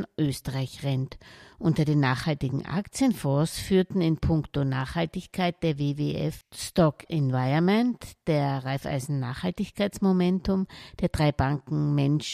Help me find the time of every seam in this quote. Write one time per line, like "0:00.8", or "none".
none